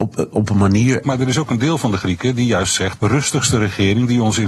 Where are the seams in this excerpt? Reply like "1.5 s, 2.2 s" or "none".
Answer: 1.0 s, 3.0 s